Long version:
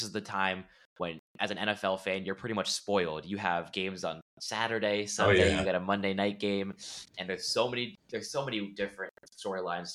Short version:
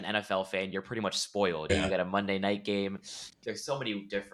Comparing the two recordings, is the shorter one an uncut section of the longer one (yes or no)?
no